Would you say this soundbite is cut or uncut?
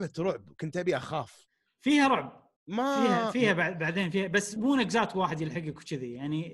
cut